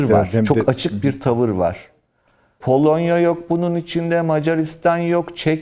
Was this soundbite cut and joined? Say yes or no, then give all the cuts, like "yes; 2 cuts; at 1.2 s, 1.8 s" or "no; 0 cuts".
yes; 1 cut; at 2.6 s